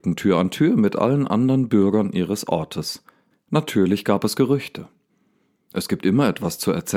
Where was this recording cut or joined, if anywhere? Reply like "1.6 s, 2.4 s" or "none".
3.3 s